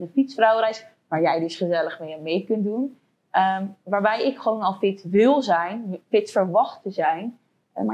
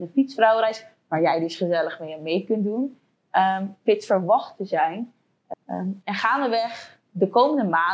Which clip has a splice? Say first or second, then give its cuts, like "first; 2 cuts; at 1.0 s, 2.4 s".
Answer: second; 2 cuts; at 3.8 s, 5.5 s